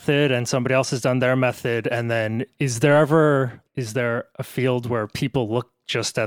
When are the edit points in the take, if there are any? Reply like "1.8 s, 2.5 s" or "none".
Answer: 3.7 s